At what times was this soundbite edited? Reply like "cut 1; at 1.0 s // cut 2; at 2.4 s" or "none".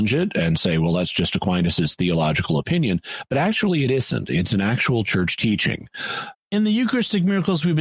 cut 1; at 6.3 s